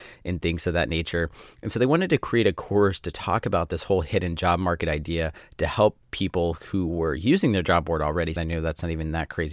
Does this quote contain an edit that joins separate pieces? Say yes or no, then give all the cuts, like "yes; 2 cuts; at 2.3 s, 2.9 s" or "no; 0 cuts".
yes; 1 cut; at 8.4 s